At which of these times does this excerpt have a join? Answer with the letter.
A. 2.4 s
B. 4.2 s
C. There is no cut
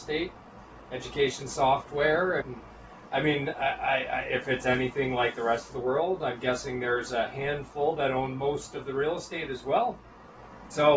A